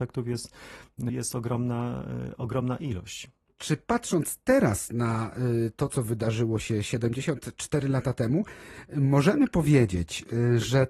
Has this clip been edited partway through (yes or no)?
yes